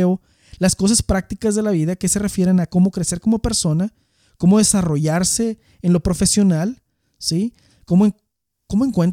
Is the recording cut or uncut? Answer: uncut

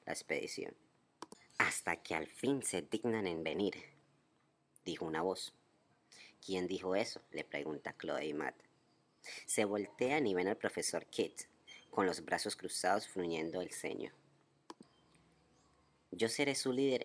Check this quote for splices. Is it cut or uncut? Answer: uncut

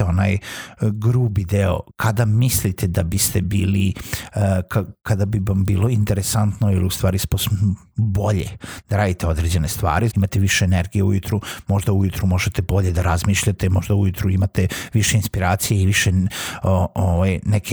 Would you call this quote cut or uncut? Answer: cut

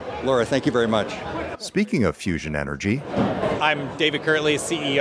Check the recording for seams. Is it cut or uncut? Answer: cut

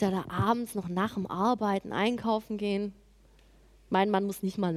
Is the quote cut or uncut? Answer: cut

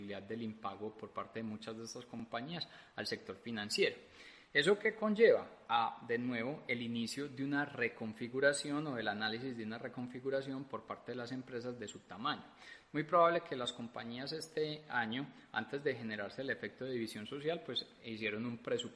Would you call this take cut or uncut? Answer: uncut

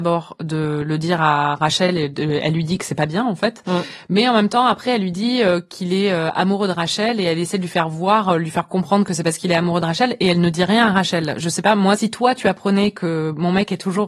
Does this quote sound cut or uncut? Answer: uncut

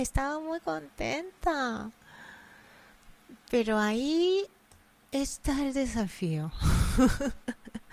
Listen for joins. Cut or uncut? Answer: uncut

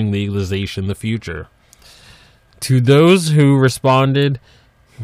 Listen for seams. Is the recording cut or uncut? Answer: uncut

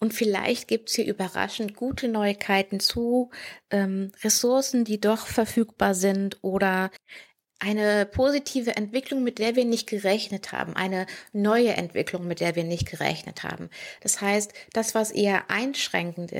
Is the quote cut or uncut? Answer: cut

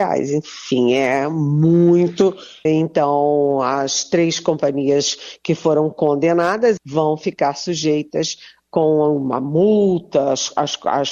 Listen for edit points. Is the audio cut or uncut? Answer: cut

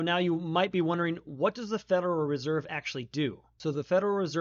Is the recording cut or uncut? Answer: uncut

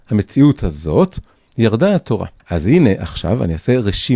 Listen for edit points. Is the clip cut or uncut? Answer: cut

